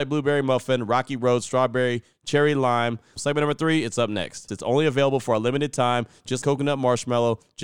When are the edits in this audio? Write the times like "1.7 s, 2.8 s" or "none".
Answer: 3.2 s, 4.5 s, 6.4 s